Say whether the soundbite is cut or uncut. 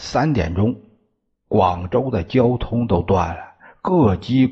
uncut